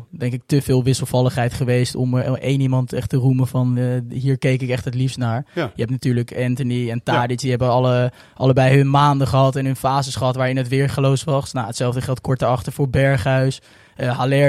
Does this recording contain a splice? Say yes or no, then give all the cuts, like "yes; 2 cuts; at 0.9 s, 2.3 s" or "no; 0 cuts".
no; 0 cuts